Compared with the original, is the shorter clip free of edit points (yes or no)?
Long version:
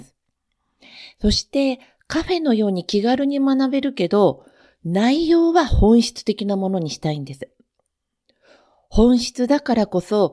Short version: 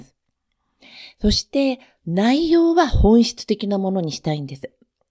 no